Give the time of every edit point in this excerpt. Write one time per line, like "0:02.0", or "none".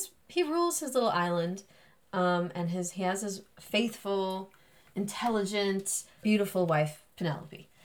0:06.2

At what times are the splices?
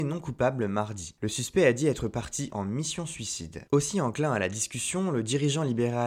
0:01.2
0:03.7

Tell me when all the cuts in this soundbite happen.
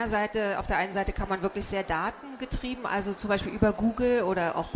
none

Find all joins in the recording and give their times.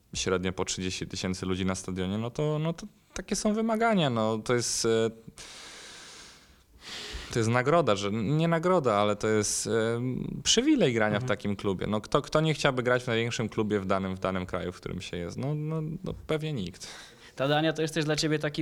none

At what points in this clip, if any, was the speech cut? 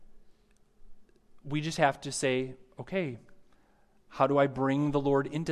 none

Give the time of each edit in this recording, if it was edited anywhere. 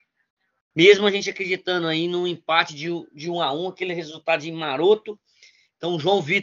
none

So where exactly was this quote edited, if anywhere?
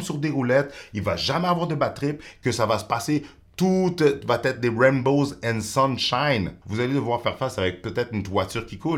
0:06.6

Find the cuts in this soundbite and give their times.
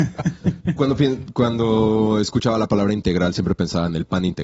none

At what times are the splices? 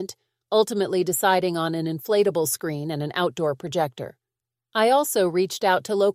none

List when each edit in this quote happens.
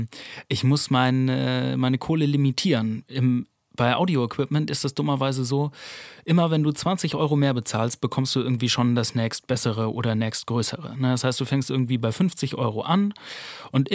none

